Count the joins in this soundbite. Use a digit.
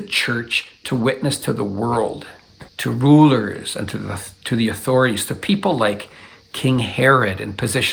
1